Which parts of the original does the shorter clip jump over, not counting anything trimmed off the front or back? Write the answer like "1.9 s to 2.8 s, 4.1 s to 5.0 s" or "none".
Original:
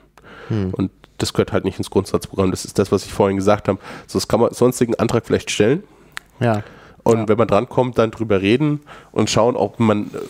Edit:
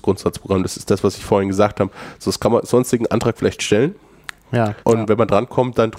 6.7 s to 7.0 s